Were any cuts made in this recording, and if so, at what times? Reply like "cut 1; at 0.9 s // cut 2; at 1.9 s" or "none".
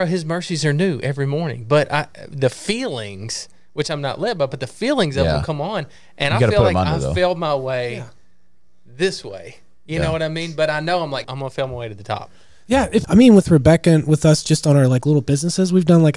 cut 1; at 11.2 s // cut 2; at 13.0 s